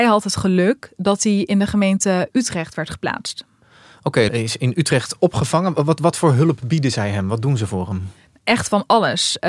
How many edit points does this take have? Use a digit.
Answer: 1